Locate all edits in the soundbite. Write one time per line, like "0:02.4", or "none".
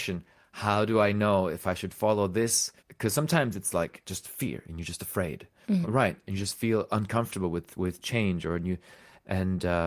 0:02.8
0:05.8